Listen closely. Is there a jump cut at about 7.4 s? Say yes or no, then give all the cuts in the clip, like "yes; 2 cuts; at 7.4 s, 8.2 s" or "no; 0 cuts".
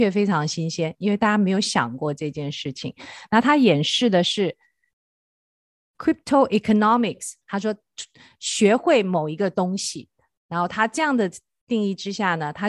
yes; 1 cut; at 7.4 s